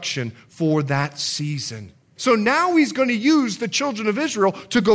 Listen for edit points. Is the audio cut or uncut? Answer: cut